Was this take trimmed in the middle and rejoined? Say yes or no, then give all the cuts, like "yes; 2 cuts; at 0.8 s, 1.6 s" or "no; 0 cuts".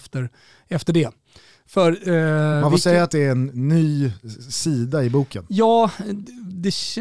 no; 0 cuts